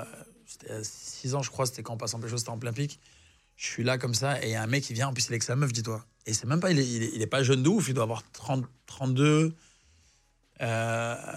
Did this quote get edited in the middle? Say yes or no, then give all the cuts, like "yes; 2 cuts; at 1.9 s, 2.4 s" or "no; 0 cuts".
no; 0 cuts